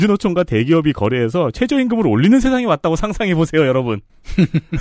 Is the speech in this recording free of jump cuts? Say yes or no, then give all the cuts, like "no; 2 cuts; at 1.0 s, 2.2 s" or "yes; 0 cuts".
yes; 0 cuts